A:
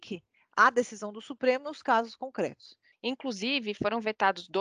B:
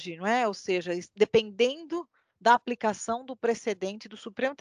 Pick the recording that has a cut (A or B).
A